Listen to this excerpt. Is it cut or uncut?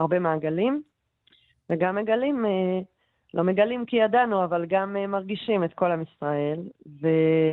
uncut